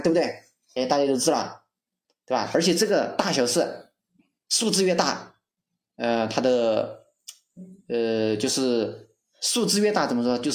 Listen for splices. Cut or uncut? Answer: uncut